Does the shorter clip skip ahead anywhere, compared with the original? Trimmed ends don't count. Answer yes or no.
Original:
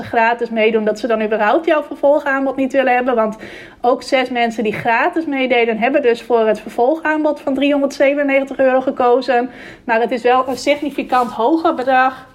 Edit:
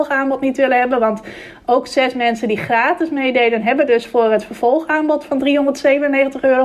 no